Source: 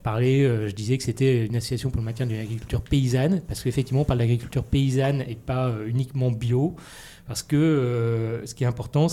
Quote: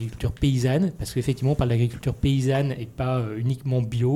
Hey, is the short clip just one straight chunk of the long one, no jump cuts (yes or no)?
yes